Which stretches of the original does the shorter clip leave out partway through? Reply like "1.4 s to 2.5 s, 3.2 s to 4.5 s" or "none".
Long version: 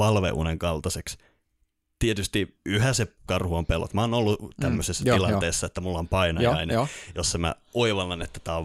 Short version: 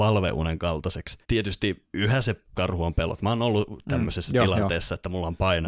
1.2 s to 1.9 s